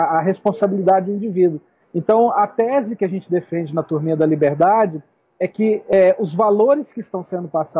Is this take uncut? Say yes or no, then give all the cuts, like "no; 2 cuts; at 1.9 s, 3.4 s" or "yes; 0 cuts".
no; 1 cut; at 1.8 s